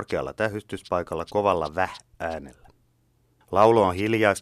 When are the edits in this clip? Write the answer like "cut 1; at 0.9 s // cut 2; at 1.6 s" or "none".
cut 1; at 3.4 s